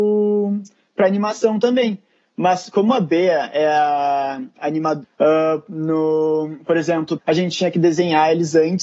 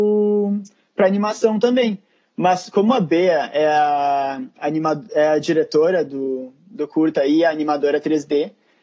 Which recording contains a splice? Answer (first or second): first